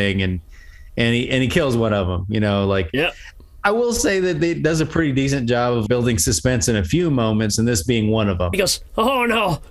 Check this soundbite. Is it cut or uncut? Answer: cut